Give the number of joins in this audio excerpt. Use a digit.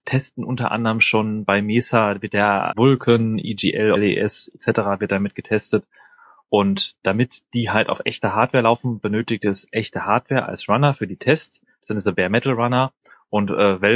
2